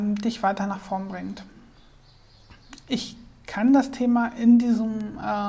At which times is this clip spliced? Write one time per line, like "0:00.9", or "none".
0:02.8